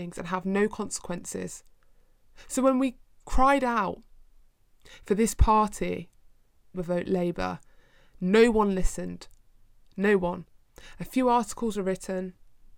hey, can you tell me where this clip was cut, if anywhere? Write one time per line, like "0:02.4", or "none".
0:06.7